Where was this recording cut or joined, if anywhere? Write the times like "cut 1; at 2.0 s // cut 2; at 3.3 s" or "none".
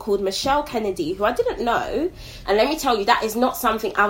cut 1; at 2.4 s